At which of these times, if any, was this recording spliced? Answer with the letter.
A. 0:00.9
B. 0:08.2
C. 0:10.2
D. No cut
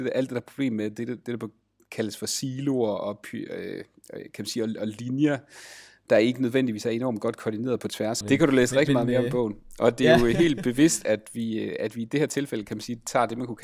B